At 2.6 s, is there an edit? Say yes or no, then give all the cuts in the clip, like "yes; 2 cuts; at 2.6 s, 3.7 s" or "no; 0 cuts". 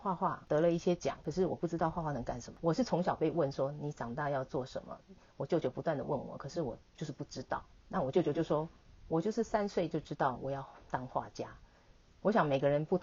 yes; 1 cut; at 2.6 s